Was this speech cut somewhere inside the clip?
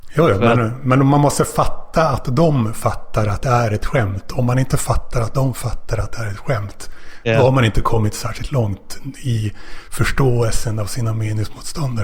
no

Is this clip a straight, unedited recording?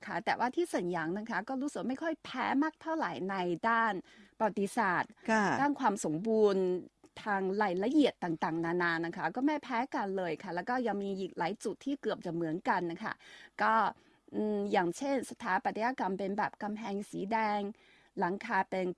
yes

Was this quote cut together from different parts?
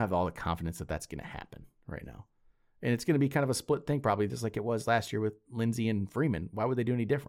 no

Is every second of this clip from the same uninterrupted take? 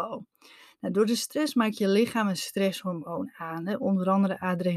yes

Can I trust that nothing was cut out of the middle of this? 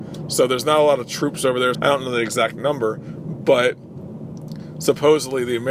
no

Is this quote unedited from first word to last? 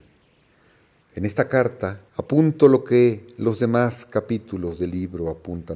no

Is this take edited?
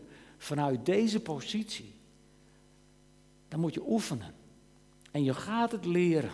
no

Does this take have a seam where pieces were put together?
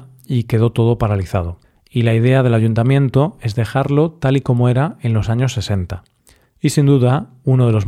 yes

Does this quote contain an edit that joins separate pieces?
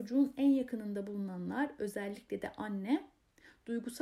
no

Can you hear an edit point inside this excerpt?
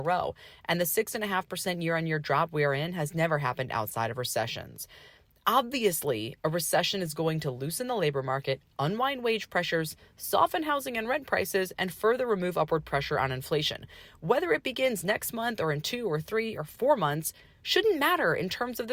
no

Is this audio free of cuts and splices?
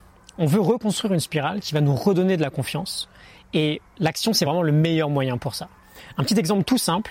yes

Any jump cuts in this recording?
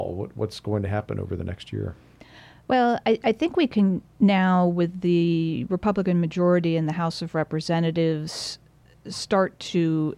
no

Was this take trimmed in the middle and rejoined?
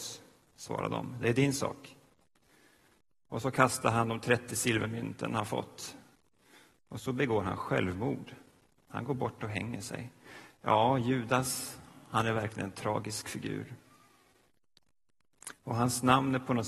no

